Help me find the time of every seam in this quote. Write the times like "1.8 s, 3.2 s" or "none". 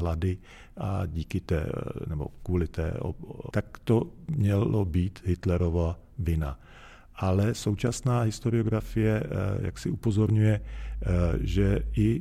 3.5 s